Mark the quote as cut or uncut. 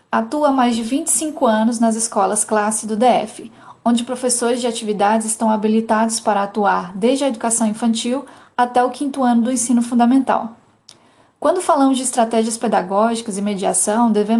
uncut